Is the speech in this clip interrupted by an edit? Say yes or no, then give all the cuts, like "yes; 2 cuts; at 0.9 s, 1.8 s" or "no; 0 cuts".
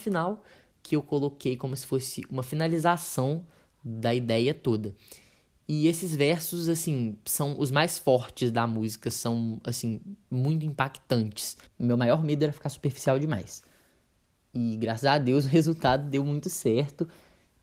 yes; 1 cut; at 11.7 s